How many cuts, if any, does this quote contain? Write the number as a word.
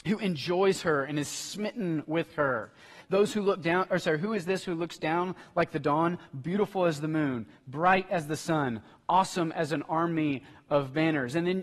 one